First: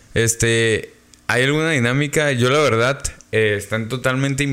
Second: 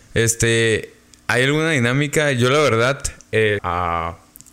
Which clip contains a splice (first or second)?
second